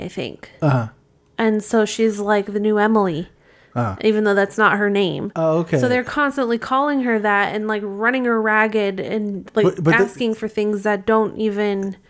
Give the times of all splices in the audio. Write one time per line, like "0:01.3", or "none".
none